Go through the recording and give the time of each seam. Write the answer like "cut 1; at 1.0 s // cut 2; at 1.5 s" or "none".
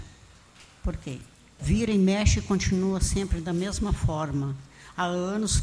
cut 1; at 1.6 s